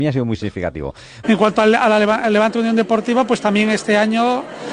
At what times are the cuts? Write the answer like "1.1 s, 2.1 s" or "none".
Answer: 1.2 s